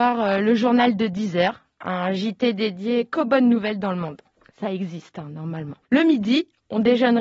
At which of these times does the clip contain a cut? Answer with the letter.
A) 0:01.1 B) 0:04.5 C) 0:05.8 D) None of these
C